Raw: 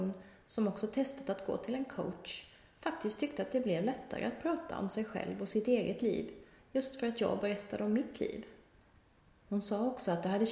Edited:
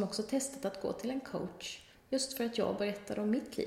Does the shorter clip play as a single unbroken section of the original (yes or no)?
no